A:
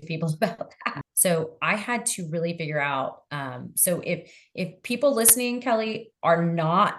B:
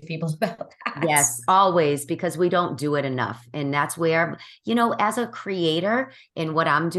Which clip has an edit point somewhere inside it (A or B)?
A